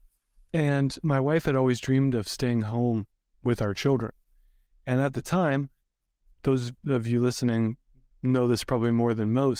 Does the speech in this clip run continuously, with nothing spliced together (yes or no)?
yes